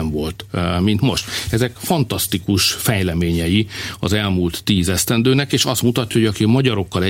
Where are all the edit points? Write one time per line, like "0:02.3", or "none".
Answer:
none

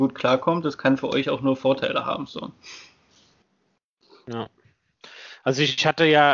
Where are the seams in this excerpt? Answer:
none

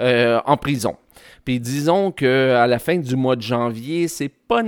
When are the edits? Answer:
none

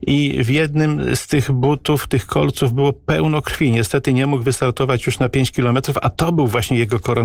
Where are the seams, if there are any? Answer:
none

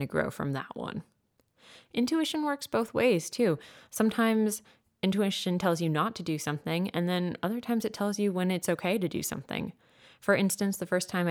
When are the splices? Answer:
none

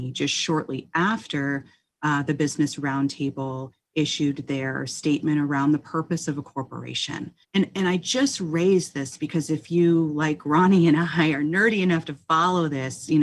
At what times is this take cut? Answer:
0:07.4

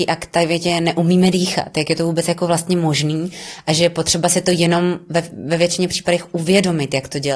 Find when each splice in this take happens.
none

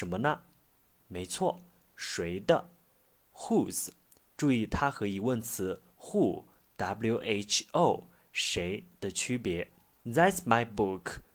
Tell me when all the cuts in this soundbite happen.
0:10.0

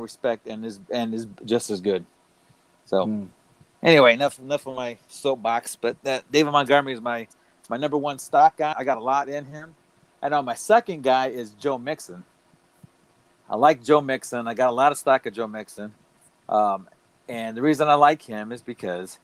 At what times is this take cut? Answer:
0:08.7

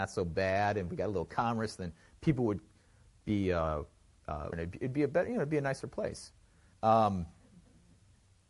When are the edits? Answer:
0:04.5
0:06.7

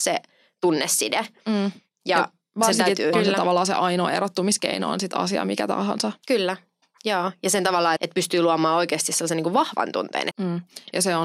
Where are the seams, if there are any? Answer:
0:03.1
0:08.0
0:10.3

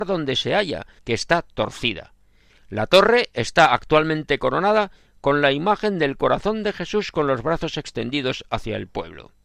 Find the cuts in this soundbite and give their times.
0:01.0
0:02.5

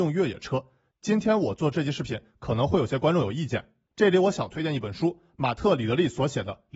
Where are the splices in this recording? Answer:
0:00.9
0:03.9

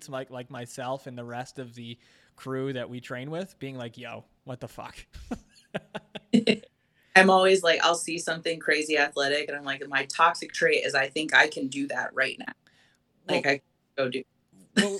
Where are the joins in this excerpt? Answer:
none

